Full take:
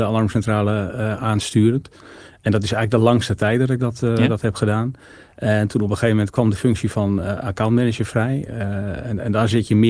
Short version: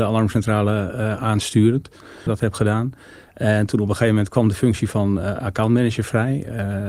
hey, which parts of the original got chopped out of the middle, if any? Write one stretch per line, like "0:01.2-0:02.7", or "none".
0:02.3-0:04.3